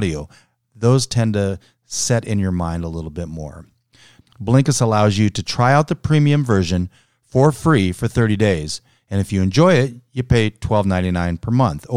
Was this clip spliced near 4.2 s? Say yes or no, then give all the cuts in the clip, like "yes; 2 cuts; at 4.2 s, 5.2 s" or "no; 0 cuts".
yes; 1 cut; at 4.2 s